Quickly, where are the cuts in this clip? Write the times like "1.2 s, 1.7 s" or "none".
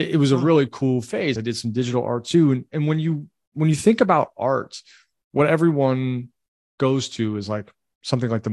none